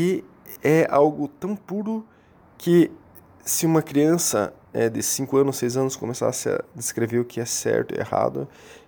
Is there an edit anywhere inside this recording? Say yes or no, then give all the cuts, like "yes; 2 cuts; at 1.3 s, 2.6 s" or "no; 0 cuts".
no; 0 cuts